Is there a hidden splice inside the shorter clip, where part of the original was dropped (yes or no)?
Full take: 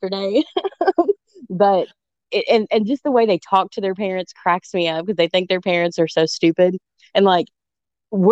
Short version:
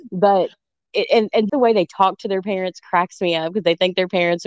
yes